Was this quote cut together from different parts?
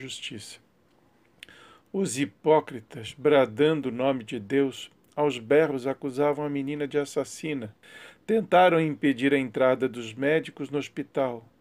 no; 0 cuts

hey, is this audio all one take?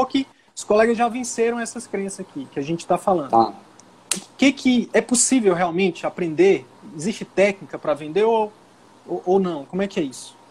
yes; 0 cuts

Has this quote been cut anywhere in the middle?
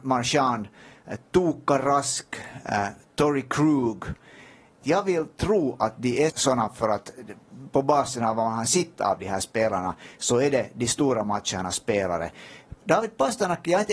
yes; 2 cuts; at 4.8 s, 6.3 s

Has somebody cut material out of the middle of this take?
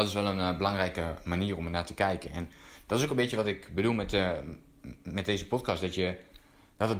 no; 0 cuts

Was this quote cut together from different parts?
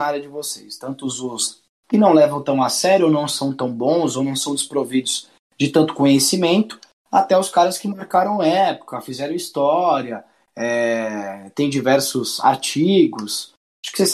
no; 0 cuts

